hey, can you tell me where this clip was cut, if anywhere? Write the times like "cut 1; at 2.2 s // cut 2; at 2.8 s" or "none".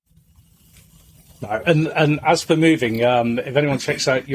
none